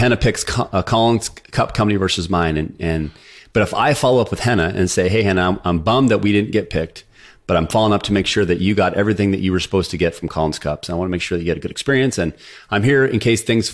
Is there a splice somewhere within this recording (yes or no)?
no